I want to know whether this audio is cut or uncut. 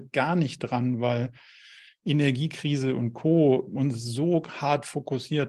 uncut